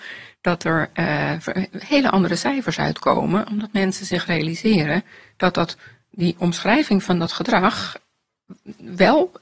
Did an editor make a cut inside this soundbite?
no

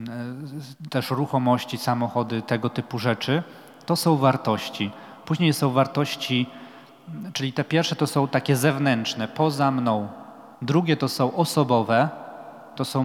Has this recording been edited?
yes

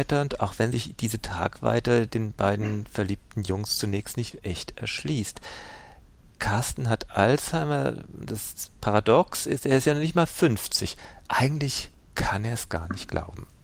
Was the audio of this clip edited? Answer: no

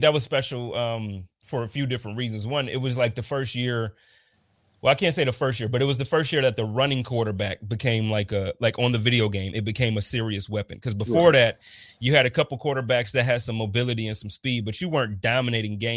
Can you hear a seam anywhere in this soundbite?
no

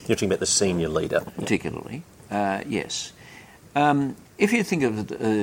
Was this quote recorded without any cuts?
no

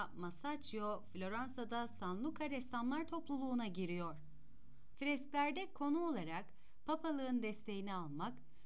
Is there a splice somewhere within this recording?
yes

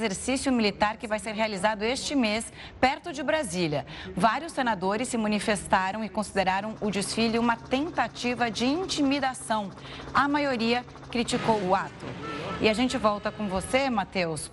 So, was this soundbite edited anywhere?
yes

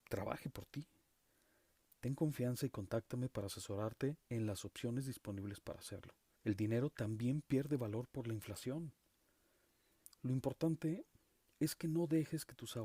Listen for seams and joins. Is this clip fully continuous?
no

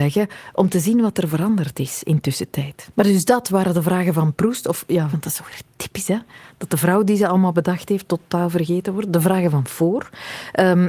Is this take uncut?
no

